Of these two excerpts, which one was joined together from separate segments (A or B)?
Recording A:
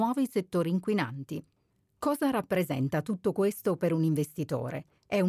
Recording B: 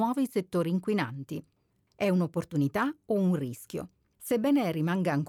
B